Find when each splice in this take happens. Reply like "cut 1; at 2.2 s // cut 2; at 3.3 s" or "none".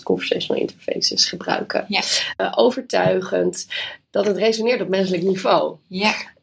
cut 1; at 2.4 s